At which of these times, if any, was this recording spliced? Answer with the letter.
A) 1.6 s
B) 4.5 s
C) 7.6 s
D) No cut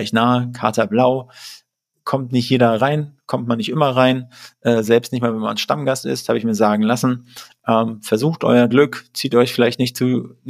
D